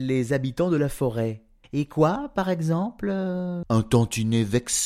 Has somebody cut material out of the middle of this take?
yes; 2 cuts; at 1.6 s, 3.6 s

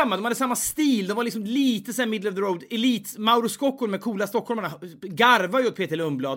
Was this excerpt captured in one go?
yes; 0 cuts

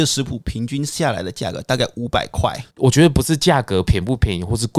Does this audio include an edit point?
yes; 1 cut; at 2.7 s

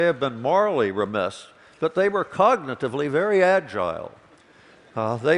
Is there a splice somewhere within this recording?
no; 0 cuts

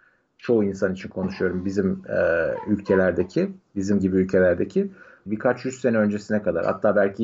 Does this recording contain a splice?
yes; 1 cut; at 5.3 s

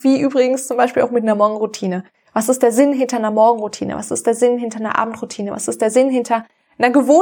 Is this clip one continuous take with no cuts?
yes; 0 cuts

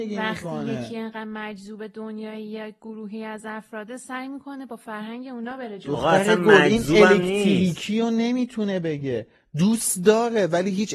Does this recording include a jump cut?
no; 0 cuts

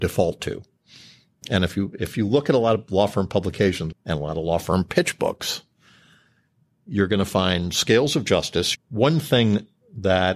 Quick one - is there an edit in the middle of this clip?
yes; 2 cuts; at 3.9 s, 8.7 s

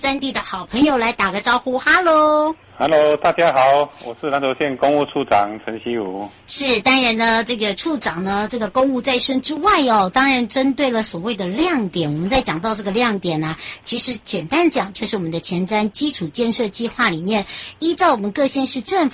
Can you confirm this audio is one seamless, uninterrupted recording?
yes; 0 cuts

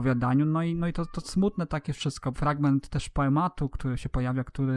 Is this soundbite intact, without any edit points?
no; 1 cut; at 2.3 s

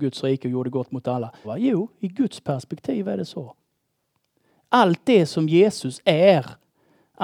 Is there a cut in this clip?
yes; 1 cut; at 1.4 s

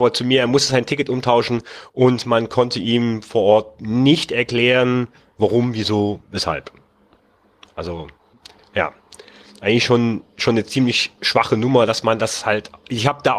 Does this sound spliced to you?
no; 0 cuts

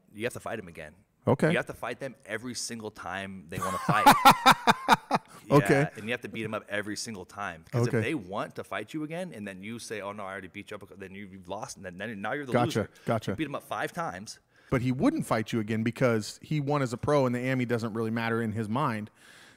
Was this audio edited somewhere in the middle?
yes; 1 cut; at 14.7 s

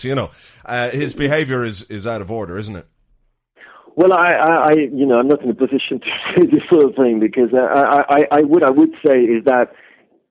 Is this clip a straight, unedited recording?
yes; 0 cuts

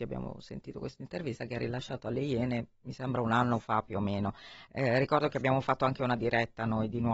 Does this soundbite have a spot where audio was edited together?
no; 0 cuts

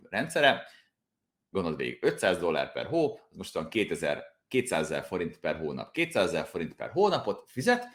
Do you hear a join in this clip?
no; 0 cuts

